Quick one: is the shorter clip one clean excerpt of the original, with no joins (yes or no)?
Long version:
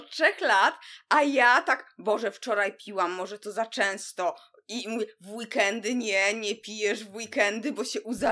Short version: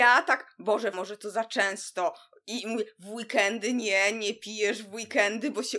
no